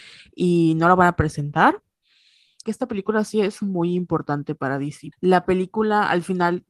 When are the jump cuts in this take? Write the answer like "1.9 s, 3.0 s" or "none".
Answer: 2.6 s, 5.1 s